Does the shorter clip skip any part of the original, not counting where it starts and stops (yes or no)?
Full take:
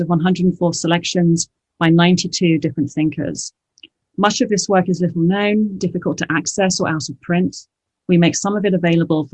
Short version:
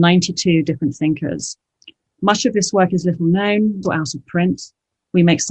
yes